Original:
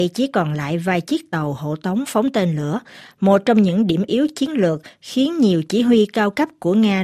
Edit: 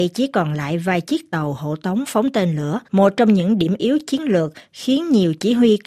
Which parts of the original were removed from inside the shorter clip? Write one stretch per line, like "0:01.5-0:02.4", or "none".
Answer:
0:02.8-0:03.1